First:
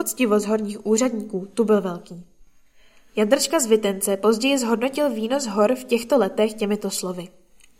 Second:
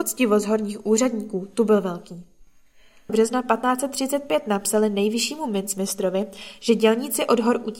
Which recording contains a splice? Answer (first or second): second